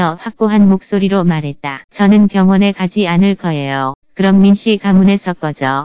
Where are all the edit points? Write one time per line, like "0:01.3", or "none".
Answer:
0:01.9
0:04.0